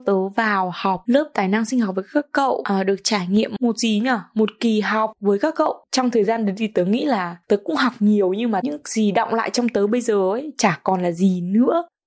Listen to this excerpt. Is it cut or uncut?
cut